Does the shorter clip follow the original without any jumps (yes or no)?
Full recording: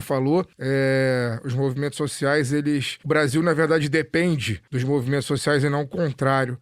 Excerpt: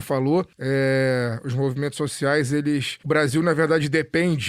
yes